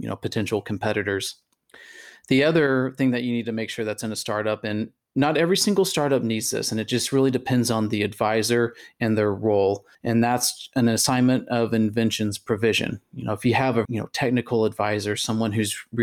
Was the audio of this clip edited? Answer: yes; 2 cuts; at 9.9 s, 13.9 s

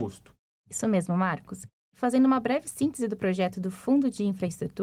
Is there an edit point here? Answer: no; 0 cuts

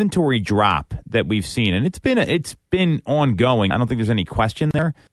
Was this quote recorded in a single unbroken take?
no; 1 cut; at 3.7 s

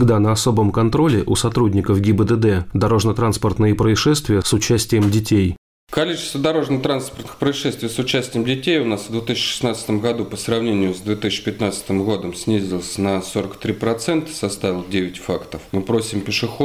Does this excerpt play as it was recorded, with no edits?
no; 1 cut; at 15.7 s

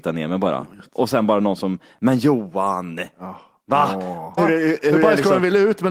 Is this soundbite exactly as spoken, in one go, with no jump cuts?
no; 1 cut; at 4.4 s

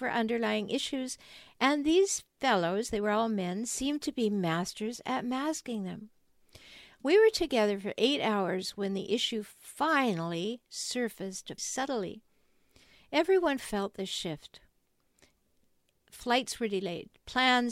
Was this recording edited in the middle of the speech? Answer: yes; 1 cut; at 11.6 s

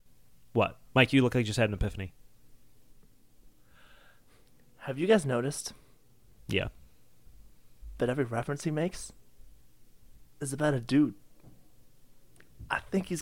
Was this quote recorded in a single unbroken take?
no; 1 cut; at 6.4 s

